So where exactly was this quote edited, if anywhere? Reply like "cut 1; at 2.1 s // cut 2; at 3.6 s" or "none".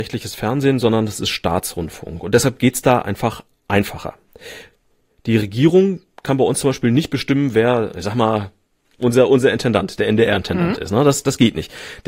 none